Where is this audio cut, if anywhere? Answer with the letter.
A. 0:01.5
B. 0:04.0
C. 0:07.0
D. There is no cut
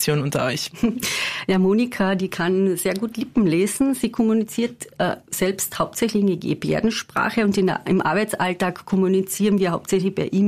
D